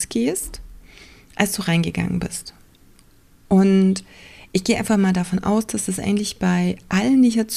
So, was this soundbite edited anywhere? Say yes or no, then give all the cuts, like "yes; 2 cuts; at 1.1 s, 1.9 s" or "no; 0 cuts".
no; 0 cuts